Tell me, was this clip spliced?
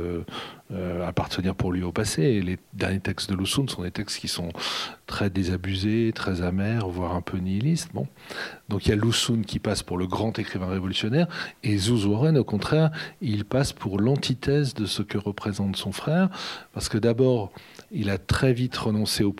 no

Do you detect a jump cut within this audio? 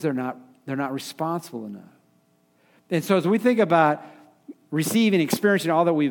no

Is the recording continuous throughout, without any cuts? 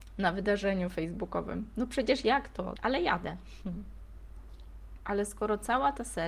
no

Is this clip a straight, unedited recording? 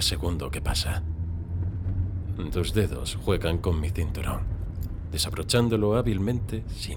no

